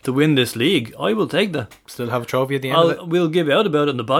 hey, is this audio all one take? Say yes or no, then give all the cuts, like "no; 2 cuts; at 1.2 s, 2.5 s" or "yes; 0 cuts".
yes; 0 cuts